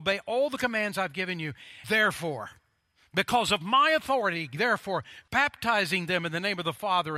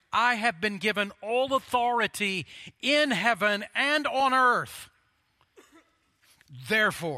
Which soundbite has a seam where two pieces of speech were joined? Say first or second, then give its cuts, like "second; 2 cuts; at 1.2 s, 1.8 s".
first; 2 cuts; at 1.8 s, 5.3 s